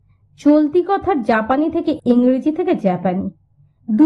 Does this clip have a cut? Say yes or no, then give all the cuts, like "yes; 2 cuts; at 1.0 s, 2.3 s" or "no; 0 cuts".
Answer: yes; 1 cut; at 2.0 s